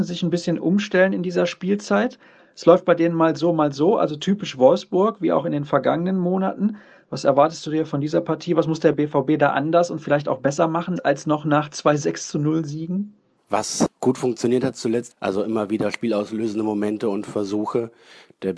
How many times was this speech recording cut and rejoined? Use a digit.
3